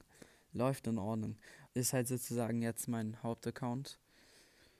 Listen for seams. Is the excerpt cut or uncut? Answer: cut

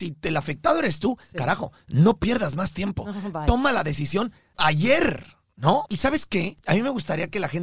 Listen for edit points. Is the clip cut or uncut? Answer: cut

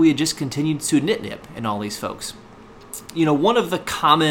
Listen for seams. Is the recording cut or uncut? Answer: cut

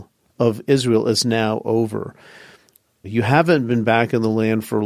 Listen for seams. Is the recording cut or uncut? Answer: cut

